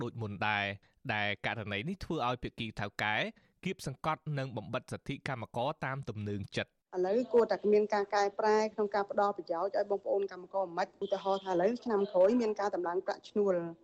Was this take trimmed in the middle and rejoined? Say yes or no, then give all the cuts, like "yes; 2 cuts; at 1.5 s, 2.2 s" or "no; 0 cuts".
no; 0 cuts